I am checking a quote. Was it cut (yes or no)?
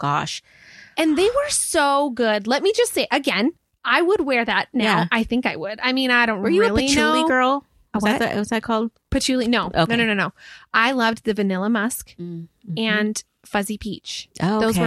no